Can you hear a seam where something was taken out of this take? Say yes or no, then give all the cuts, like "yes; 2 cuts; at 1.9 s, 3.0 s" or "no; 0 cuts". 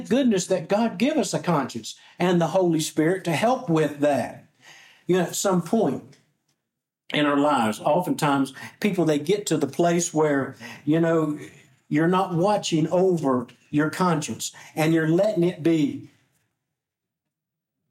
no; 0 cuts